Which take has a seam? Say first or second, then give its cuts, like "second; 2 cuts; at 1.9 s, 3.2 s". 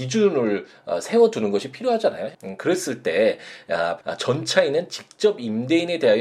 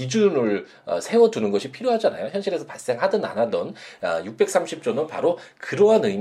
first; 2 cuts; at 2.3 s, 4.0 s